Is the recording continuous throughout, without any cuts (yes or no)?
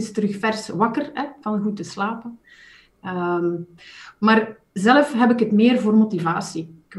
yes